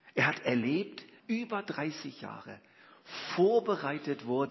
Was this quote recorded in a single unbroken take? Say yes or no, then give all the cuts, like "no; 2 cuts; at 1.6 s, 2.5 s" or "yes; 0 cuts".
no; 1 cut; at 1.2 s